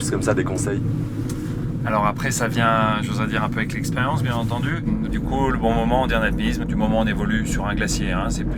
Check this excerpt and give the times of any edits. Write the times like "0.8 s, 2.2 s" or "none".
5.1 s, 6.6 s